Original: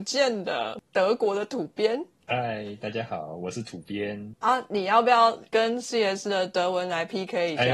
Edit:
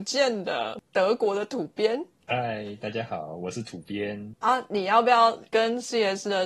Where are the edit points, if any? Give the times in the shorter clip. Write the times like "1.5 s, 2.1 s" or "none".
none